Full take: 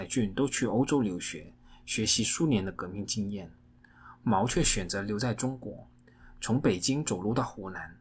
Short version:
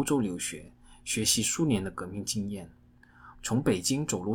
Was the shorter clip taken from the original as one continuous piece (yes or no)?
no